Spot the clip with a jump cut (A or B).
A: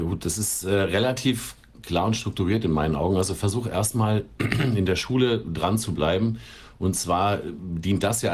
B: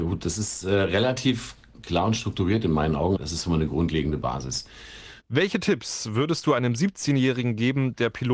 B